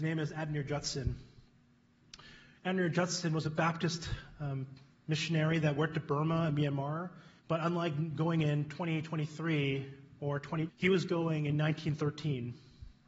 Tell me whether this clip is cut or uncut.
cut